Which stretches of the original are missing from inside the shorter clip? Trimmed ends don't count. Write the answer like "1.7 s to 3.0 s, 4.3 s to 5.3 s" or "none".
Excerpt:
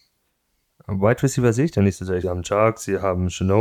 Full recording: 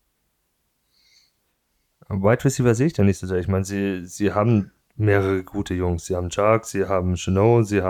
3.4 s to 6.1 s